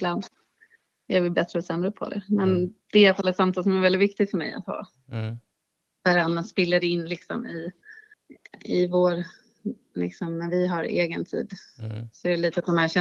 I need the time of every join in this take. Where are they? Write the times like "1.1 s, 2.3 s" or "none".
none